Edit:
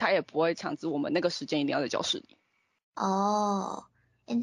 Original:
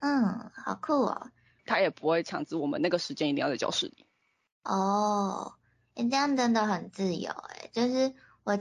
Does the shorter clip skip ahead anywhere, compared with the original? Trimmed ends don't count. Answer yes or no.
no